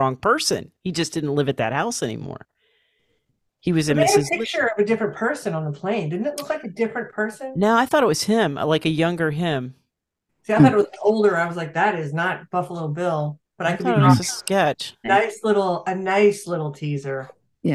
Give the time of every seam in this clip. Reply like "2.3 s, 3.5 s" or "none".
15.0 s